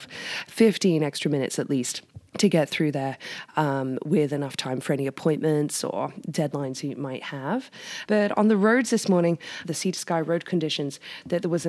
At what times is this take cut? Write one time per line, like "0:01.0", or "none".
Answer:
0:02.3
0:08.0
0:09.6